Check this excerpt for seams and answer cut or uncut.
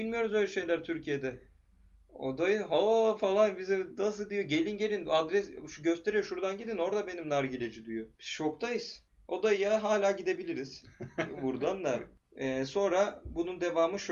uncut